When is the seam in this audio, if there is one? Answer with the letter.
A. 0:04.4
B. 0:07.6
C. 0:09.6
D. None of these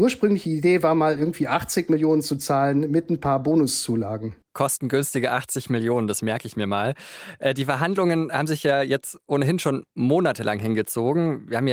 A